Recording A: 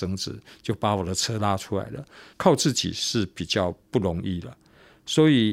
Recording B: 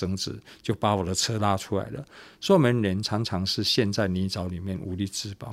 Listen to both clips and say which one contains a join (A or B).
A